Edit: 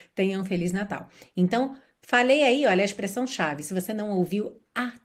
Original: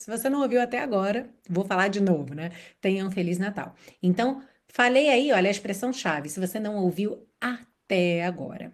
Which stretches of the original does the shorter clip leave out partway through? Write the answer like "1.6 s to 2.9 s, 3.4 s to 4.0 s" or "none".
none